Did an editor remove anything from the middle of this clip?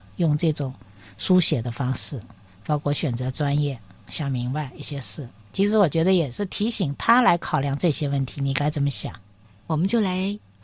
yes; 1 cut; at 2.5 s

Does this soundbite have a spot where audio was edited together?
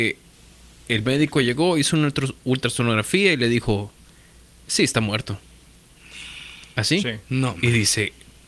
no; 0 cuts

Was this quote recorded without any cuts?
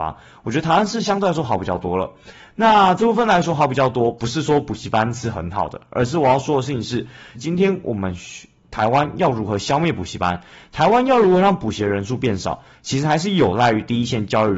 no; 1 cut; at 7.3 s

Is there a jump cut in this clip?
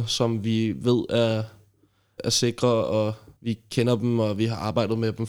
yes; 2 cuts; at 2.2 s, 3.4 s

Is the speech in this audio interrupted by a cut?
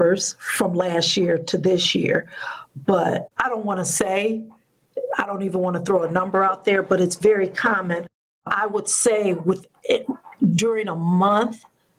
no; 0 cuts

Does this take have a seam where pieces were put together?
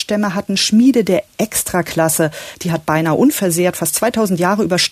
yes; 1 cut; at 2.5 s

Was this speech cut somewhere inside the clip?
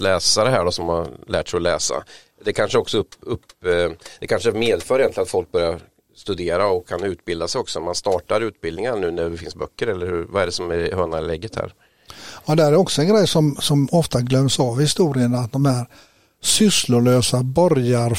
no; 0 cuts

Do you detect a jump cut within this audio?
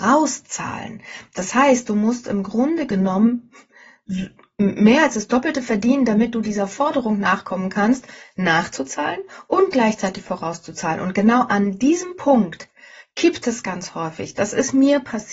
no; 0 cuts

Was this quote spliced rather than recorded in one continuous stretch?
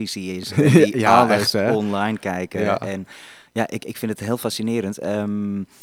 no; 0 cuts

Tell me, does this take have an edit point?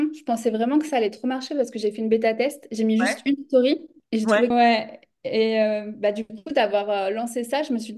yes; 1 cut; at 4.5 s

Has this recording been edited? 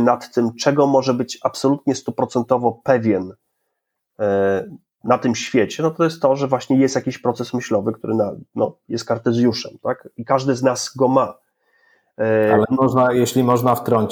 no; 0 cuts

